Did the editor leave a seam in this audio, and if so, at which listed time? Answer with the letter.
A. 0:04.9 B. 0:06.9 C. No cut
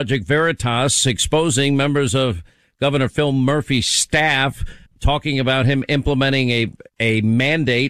A